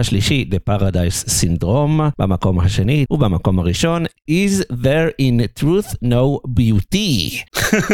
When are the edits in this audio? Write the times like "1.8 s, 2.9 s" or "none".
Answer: 3.1 s